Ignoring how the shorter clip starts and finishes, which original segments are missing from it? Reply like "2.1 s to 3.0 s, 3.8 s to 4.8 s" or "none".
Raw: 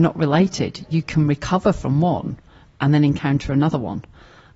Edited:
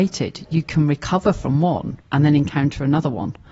2.4 s to 2.7 s

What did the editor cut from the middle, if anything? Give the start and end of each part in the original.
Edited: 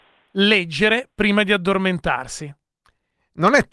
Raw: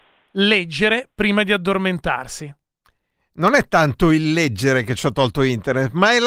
none

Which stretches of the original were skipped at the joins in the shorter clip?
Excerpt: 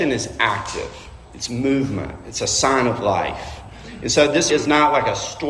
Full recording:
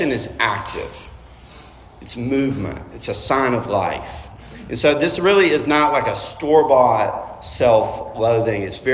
1.2 s to 1.9 s, 5.2 s to 5.5 s

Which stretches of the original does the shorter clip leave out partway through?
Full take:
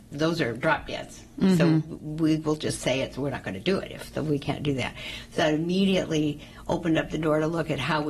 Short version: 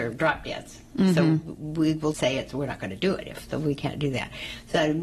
2.6 s to 2.8 s

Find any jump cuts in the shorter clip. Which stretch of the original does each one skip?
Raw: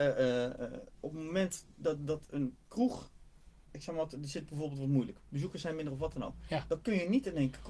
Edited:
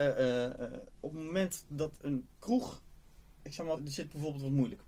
1.7 s to 2.0 s, 4.1 s to 4.1 s

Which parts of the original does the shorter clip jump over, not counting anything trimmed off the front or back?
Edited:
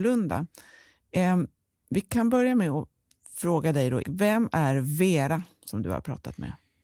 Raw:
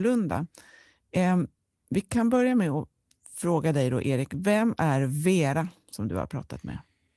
4.0 s to 4.3 s

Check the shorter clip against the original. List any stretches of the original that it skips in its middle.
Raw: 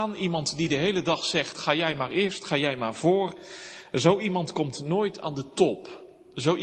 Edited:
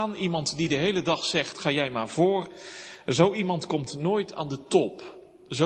1.5 s to 2.4 s

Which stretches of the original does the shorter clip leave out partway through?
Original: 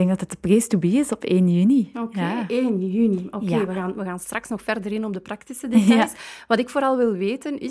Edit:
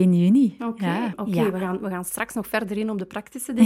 2.5 s to 3.3 s

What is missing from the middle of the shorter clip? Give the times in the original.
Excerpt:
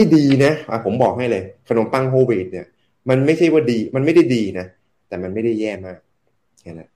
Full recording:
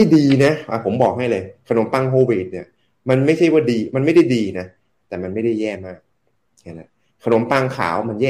none

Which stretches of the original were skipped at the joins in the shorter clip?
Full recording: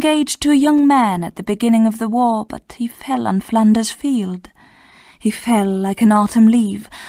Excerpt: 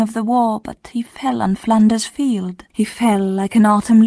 4.6 s to 5.2 s

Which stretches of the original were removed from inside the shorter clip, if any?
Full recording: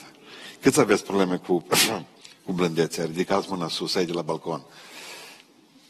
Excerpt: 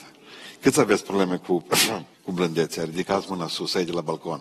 2.1 s to 2.3 s

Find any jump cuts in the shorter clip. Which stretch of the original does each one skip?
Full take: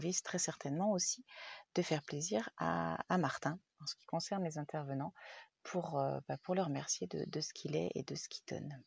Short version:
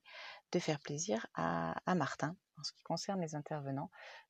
none

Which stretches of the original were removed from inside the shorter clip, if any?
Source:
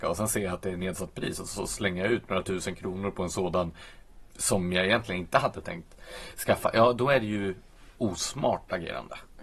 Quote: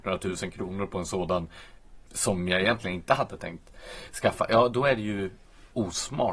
none

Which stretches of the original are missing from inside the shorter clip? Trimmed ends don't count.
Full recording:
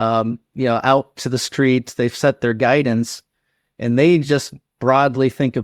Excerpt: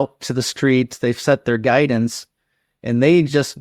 none

